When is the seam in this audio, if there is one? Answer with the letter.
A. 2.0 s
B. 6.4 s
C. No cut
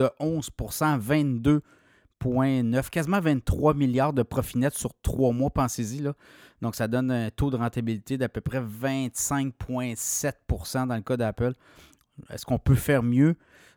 C